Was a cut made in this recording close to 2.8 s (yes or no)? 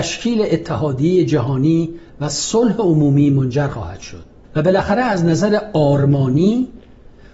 no